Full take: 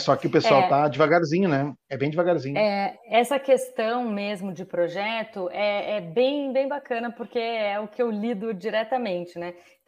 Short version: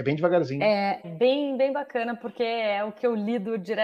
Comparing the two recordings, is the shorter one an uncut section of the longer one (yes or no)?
no